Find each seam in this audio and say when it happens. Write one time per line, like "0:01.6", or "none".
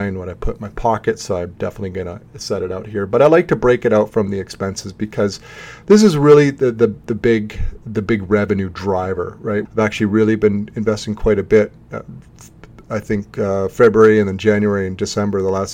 0:09.7